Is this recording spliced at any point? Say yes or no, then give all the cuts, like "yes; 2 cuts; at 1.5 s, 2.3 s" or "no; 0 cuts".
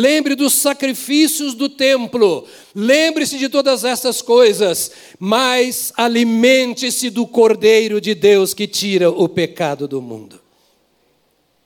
no; 0 cuts